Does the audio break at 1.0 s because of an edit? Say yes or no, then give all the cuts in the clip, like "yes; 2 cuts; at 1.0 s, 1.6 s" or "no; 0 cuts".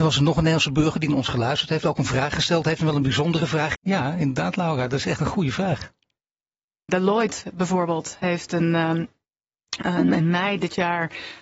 no; 2 cuts; at 3.8 s, 6.9 s